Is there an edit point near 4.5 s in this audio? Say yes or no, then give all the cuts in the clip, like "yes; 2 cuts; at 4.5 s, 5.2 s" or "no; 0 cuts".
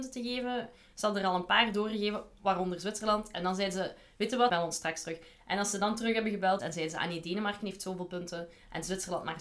yes; 2 cuts; at 4.5 s, 6.6 s